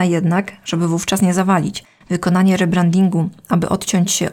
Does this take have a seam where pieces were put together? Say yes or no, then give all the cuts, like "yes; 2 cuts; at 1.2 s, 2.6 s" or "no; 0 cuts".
no; 0 cuts